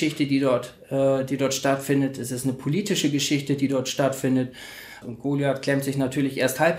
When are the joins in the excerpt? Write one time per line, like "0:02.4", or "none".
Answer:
0:05.0